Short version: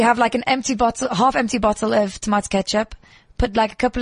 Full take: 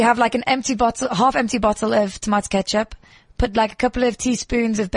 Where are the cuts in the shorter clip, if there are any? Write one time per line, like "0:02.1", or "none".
none

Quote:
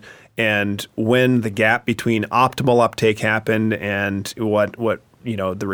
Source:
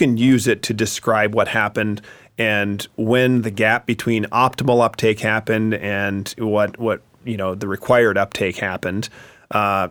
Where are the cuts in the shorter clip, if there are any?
none

